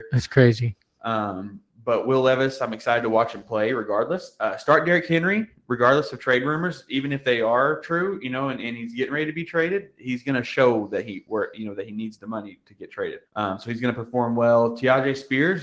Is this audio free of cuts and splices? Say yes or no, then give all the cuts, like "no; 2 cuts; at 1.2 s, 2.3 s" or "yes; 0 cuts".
no; 1 cut; at 13.3 s